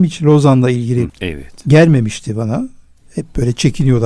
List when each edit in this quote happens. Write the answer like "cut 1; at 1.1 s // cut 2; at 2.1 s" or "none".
cut 1; at 1.1 s